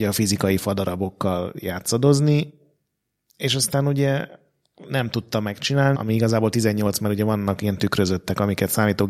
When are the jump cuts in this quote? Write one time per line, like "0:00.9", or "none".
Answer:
0:05.9